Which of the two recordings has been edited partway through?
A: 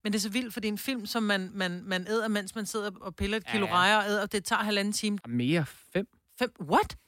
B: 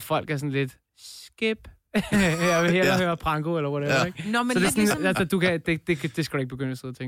A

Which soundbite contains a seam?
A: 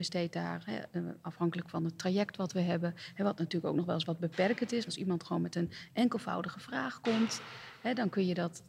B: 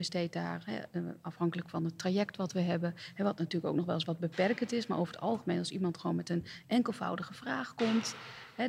A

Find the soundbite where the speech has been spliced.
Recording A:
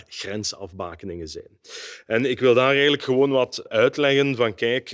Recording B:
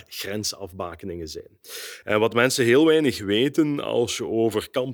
B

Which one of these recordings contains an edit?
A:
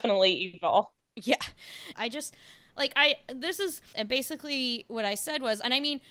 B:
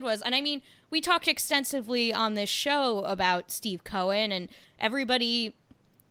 A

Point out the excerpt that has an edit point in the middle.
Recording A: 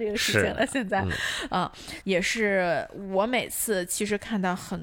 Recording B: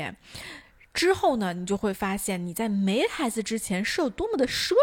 A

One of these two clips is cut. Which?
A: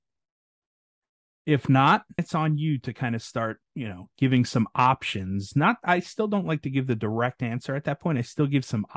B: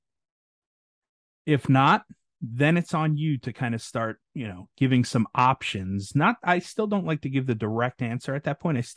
A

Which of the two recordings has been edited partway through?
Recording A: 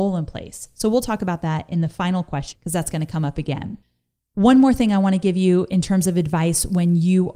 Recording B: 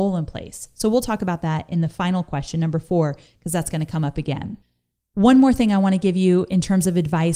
A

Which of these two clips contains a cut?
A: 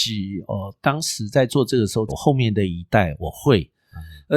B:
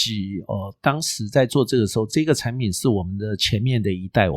A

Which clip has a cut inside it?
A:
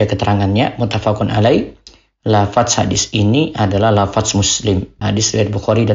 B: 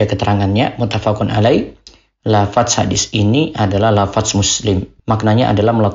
A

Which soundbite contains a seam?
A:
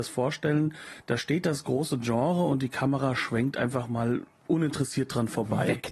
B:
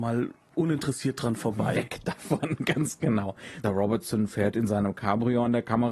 B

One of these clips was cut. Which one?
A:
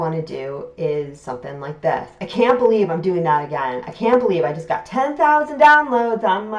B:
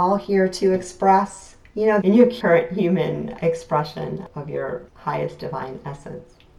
B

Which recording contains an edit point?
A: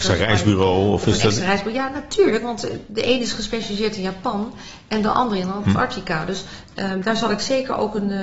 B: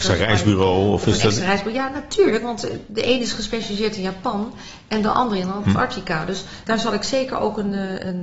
B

